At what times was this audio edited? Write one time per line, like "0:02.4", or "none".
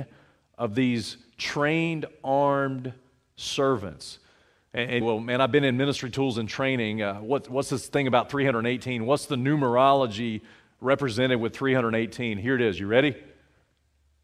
0:05.0